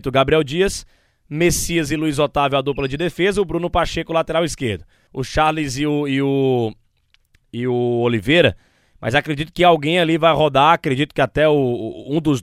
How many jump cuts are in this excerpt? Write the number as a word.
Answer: one